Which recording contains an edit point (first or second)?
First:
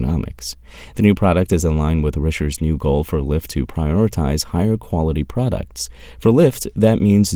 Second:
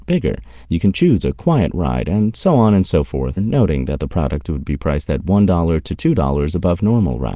second